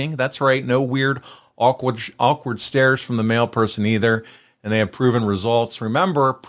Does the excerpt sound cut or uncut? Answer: uncut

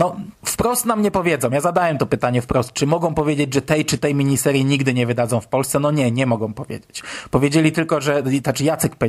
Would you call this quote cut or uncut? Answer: uncut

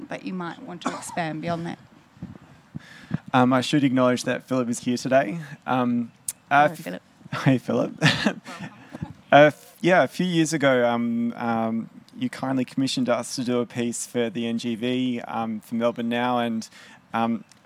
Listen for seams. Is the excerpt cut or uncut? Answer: cut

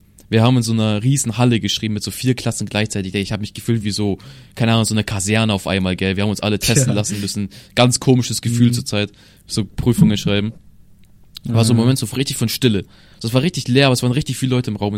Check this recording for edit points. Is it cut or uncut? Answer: uncut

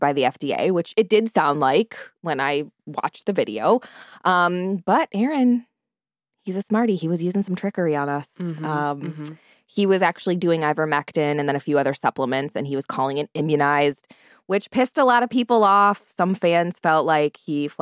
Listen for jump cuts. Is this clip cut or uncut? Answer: uncut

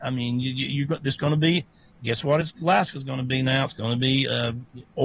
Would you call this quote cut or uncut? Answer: uncut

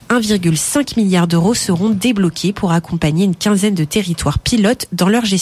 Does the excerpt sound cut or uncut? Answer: uncut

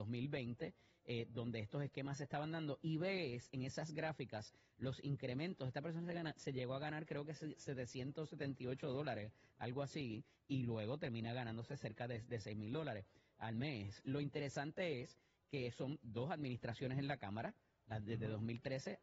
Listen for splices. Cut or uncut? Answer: cut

